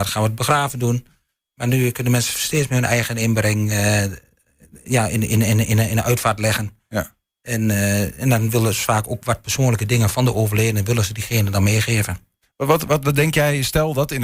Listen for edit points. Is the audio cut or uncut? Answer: uncut